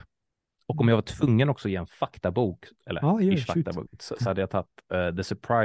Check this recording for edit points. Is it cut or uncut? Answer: uncut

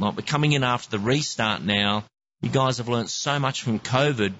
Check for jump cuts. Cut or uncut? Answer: uncut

